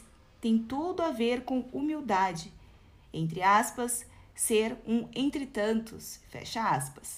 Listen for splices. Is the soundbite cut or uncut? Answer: uncut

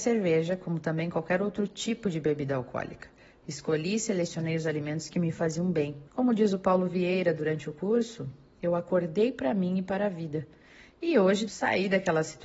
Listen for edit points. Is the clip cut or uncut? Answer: cut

